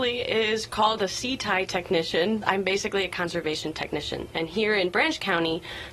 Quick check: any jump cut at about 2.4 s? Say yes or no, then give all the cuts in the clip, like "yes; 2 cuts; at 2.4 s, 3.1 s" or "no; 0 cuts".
yes; 2 cuts; at 2.4 s, 4.3 s